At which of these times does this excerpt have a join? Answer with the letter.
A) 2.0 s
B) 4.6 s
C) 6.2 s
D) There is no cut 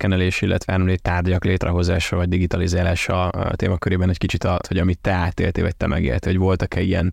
B